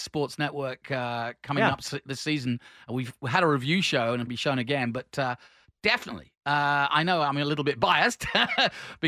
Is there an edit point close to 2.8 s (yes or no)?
no